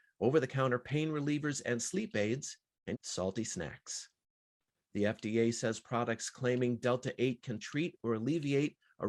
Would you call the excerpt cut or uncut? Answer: cut